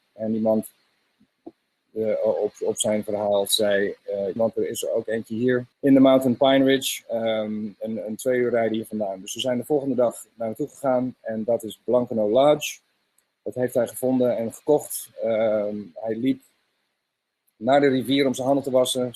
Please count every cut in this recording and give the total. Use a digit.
2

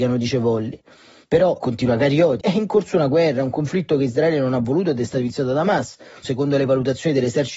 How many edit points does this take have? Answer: 2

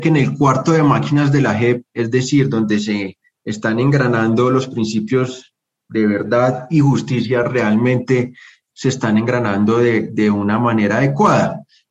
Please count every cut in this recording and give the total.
0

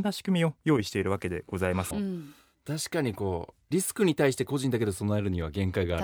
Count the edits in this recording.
1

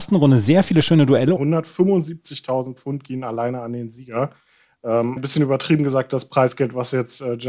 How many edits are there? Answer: 2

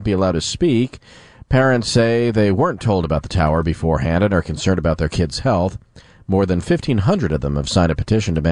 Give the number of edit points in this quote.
0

